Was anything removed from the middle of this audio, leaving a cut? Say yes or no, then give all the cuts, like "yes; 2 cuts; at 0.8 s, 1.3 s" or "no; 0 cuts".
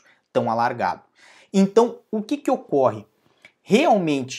no; 0 cuts